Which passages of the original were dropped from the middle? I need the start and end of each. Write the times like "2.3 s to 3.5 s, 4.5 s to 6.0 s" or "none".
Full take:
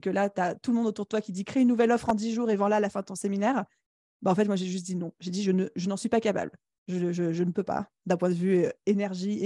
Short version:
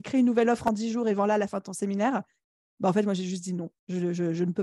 5.1 s to 6.7 s